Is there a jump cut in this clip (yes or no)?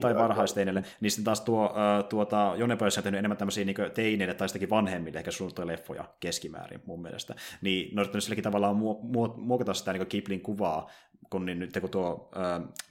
no